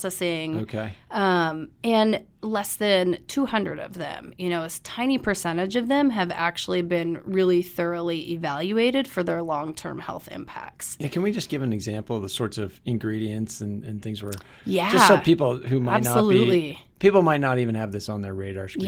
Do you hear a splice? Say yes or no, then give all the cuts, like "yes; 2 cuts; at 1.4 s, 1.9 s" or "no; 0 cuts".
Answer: no; 0 cuts